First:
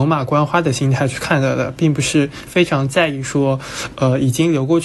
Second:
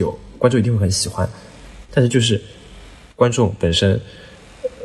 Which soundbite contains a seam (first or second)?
second